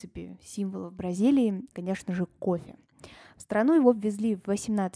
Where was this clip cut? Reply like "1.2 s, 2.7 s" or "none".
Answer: 1.7 s

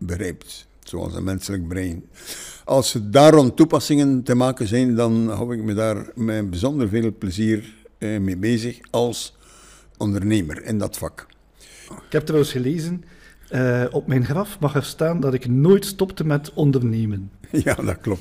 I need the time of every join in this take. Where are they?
11.9 s

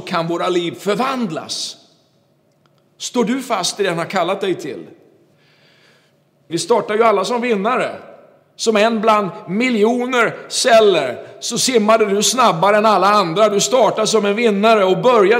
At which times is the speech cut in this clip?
6.5 s

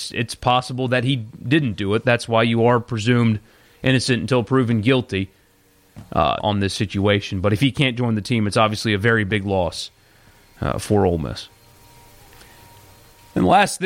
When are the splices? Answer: 6.4 s

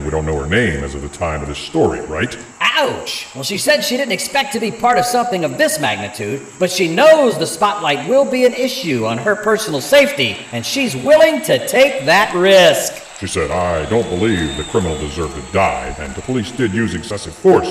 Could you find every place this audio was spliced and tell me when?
none

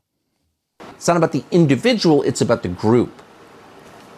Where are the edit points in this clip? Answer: 0.9 s

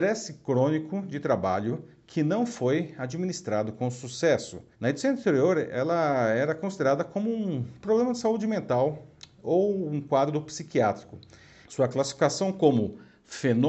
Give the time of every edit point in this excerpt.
4.7 s, 11.6 s

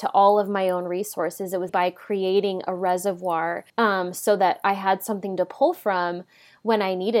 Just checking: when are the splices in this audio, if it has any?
1.7 s, 3.7 s

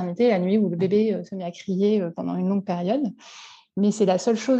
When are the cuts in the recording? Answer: none

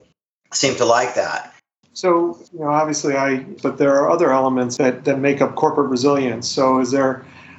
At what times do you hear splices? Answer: 3.6 s

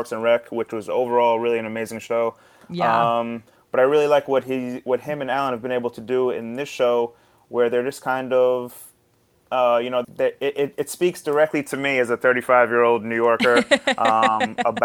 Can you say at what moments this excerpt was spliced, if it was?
10.0 s

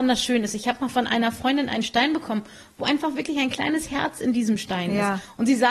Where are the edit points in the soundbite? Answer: none

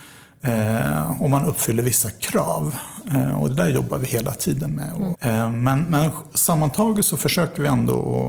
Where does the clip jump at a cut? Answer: 5.1 s

